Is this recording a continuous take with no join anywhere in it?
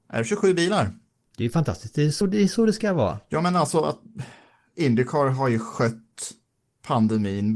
yes; 0 cuts

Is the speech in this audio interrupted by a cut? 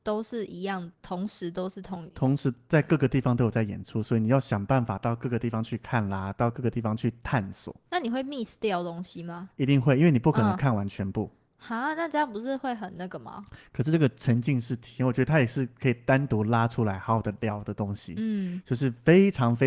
no; 0 cuts

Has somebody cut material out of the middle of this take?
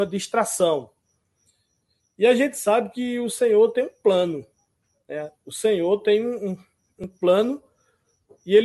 no; 0 cuts

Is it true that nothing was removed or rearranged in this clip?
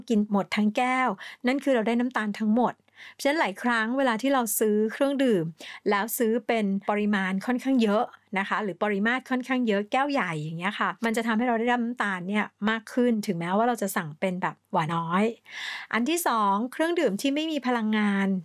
no; 1 cut; at 14.9 s

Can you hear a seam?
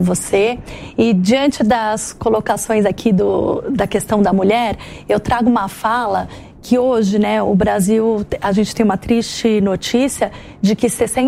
no; 0 cuts

